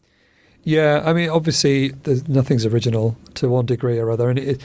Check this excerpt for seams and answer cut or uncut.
cut